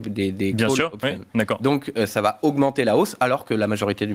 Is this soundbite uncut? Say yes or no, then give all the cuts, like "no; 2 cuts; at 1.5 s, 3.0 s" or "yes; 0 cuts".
yes; 0 cuts